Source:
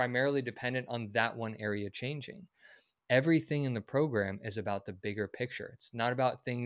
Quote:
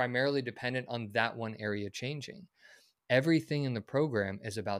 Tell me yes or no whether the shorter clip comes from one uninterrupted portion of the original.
yes